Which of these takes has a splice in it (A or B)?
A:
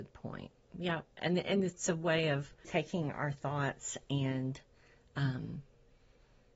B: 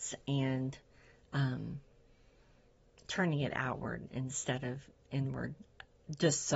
A